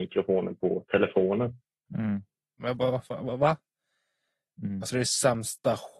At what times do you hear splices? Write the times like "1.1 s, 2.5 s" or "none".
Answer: 2.6 s, 4.8 s